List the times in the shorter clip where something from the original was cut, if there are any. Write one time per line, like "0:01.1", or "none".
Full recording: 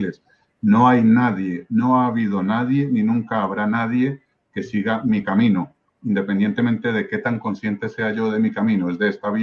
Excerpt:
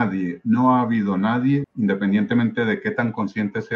0:01.6